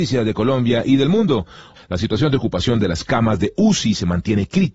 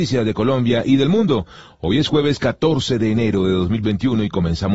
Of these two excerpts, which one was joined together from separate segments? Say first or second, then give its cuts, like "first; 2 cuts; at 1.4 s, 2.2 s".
first; 1 cut; at 1.8 s